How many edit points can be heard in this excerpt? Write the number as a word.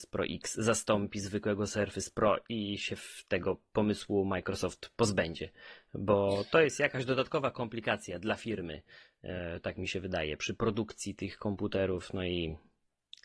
one